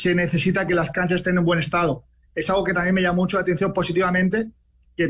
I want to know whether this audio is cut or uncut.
uncut